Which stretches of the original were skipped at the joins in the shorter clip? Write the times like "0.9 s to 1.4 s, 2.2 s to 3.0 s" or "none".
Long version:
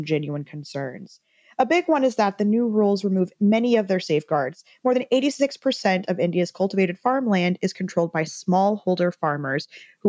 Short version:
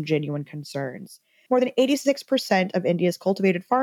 1.5 s to 4.8 s